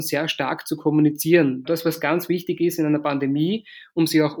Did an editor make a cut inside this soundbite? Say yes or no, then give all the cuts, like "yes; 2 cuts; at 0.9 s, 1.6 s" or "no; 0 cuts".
yes; 1 cut; at 1.6 s